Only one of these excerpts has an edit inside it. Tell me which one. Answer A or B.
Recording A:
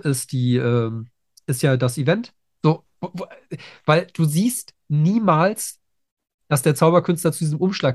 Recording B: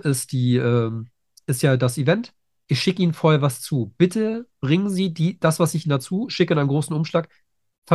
A